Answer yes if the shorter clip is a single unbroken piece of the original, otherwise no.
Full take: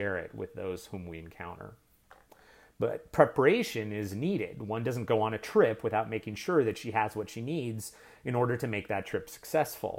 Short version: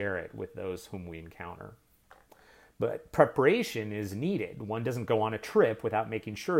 yes